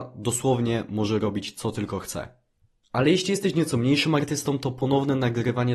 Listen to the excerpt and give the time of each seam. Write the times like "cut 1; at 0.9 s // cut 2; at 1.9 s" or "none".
none